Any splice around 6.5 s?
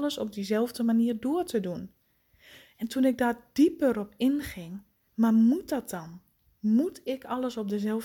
no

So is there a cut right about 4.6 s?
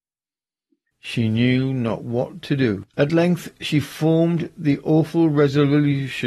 no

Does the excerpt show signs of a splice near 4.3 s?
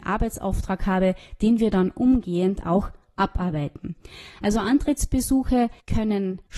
no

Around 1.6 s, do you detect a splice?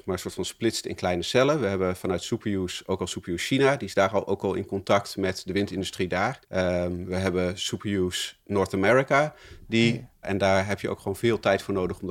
no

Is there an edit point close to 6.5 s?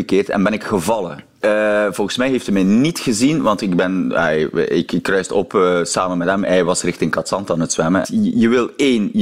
no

